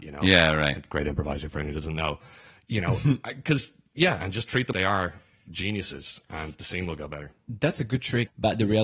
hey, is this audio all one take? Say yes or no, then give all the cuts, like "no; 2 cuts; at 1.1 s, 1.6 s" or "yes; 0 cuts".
no; 1 cut; at 4.7 s